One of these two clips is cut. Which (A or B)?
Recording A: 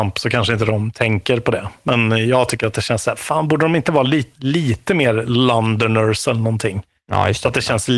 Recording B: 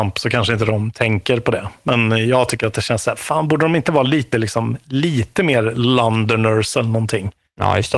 A